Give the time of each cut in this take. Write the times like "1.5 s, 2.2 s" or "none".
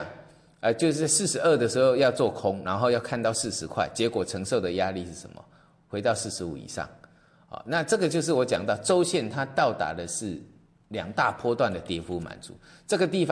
none